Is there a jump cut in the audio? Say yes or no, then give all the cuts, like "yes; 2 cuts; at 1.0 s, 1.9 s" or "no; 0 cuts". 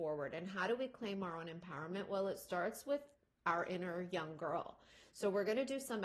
no; 0 cuts